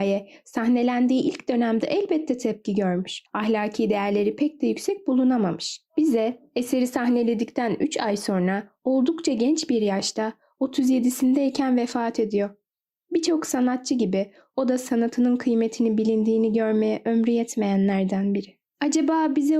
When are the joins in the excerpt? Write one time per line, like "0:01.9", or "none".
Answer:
none

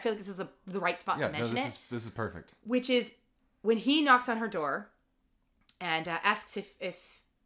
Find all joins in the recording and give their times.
none

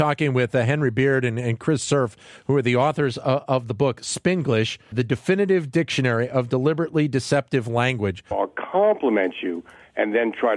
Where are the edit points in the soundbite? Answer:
0:04.9
0:08.3

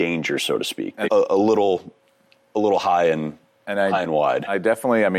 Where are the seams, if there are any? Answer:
0:01.1

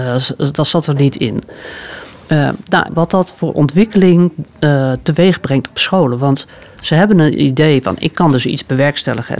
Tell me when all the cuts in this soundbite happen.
0:02.9

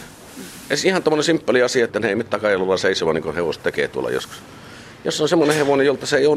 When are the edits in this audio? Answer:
0:01.9

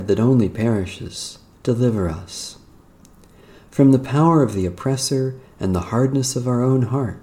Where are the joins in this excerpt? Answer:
0:01.5

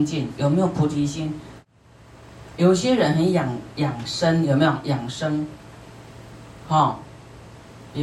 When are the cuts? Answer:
none

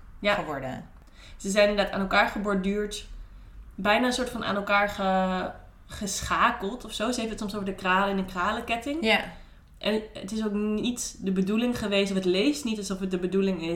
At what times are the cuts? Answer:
none

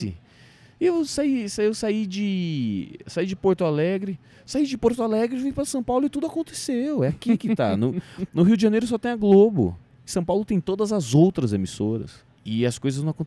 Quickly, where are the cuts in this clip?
0:12.3

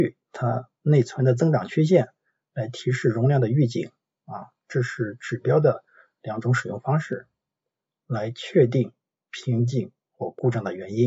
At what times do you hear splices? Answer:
0:08.0

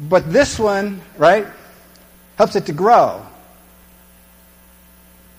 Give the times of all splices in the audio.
0:01.1

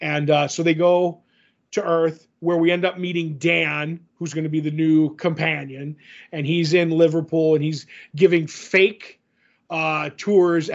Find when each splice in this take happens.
none

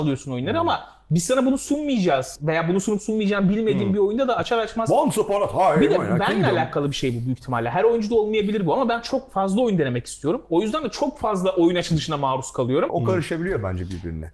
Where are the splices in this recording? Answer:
0:12.9

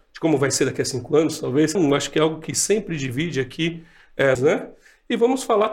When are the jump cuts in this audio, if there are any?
0:01.8
0:04.4

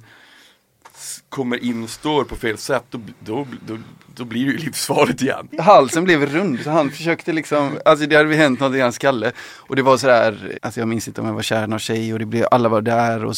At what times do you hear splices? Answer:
0:05.5
0:10.5

